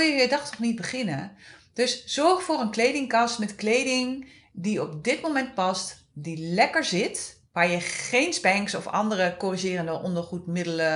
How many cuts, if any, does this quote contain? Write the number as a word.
zero